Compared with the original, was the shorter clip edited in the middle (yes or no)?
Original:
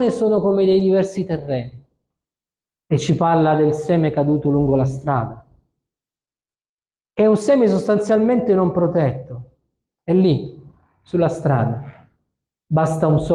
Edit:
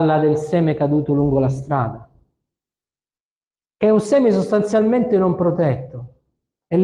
no